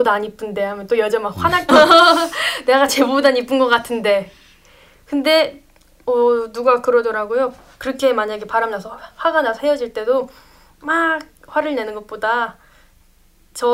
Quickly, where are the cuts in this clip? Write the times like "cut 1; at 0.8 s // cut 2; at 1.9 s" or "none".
cut 1; at 1.7 s